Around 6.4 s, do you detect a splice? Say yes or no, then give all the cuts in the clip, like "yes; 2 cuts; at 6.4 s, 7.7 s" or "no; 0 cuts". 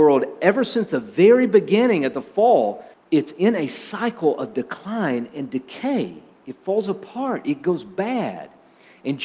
no; 1 cut; at 2.9 s